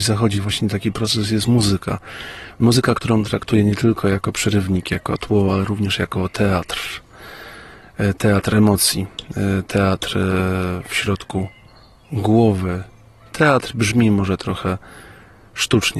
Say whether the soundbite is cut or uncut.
uncut